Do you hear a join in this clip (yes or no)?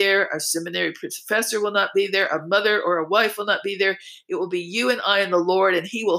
no